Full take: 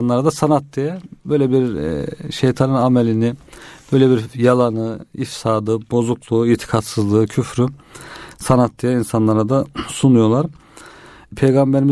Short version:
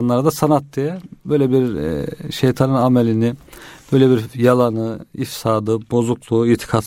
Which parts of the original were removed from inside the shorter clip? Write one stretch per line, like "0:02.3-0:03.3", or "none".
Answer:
none